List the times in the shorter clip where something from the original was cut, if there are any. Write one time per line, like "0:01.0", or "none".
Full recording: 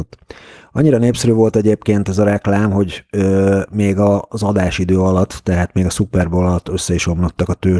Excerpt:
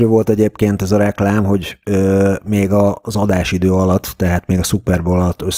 none

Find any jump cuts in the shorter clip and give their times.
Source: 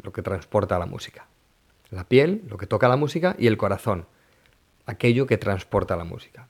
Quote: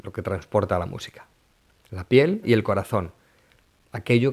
0:02.4

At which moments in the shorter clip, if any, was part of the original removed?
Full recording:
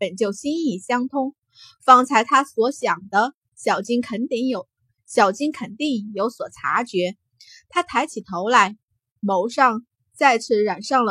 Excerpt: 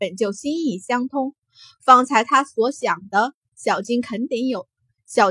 none

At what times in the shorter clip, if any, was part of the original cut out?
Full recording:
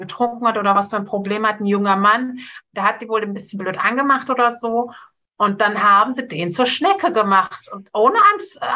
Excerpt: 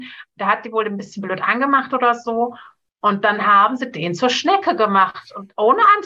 none

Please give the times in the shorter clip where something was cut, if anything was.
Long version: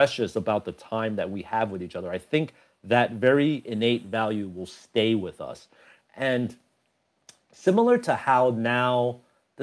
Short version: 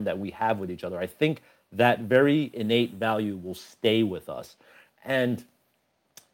none

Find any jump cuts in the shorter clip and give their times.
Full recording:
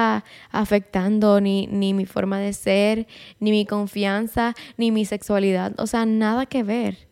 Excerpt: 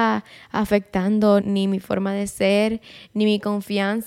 0:01.4

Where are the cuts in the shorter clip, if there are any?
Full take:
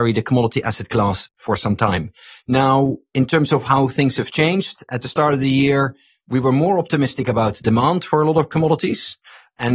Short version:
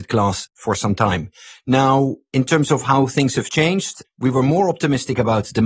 0:04.0

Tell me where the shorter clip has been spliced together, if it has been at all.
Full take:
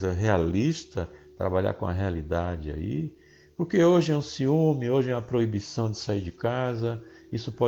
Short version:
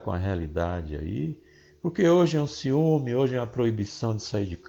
none

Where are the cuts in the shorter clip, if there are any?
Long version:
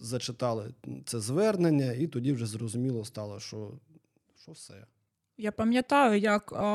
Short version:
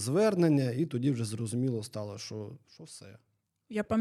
0:02.6

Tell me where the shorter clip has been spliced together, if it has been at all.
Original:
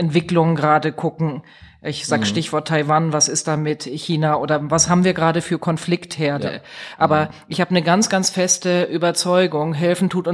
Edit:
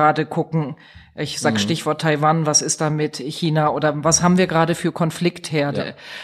none

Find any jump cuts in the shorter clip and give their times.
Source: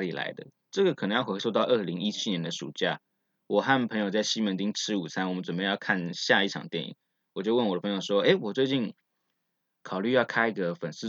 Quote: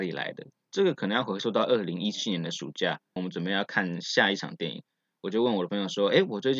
0:03.2

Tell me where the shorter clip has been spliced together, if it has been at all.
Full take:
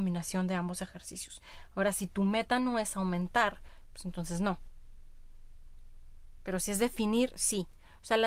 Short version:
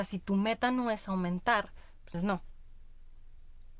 0:02.1

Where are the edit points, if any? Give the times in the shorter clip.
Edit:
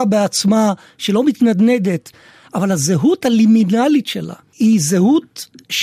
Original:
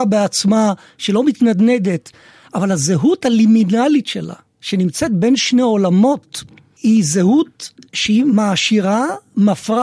0:04.4

